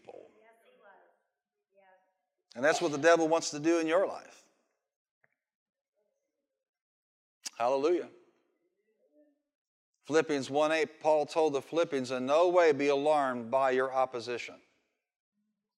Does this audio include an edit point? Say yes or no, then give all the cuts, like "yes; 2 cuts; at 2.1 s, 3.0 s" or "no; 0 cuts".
no; 0 cuts